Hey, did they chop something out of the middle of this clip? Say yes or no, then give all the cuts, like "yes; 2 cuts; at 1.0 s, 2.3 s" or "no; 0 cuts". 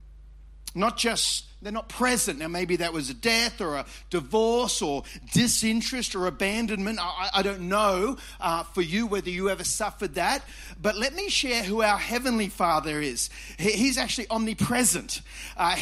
no; 0 cuts